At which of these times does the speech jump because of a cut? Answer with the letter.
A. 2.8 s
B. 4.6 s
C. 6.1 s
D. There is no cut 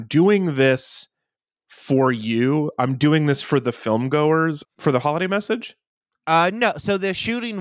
B